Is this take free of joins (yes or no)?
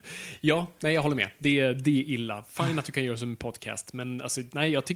yes